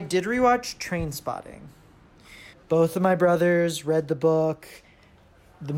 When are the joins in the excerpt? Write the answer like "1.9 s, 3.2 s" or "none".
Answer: 2.5 s